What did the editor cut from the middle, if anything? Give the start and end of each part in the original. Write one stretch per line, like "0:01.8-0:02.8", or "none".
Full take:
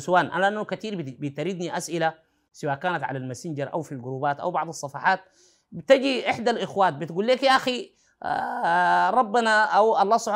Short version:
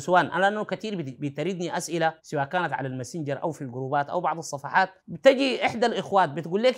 0:02.2-0:02.5
0:05.3-0:05.6